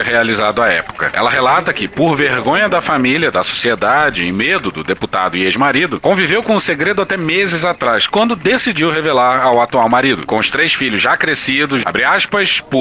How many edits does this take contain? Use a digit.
1